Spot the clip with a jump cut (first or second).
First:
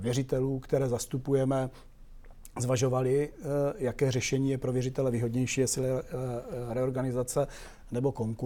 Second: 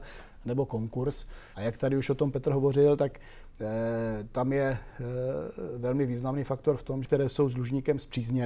second